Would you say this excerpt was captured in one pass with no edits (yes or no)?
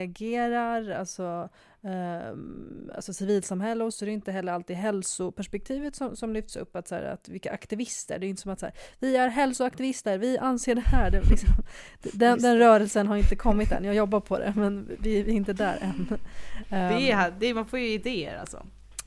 no